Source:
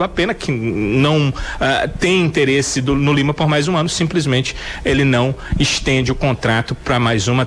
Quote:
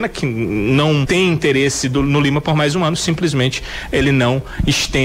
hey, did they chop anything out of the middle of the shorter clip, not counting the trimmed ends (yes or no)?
yes